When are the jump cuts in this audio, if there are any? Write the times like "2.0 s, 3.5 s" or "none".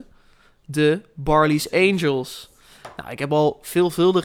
none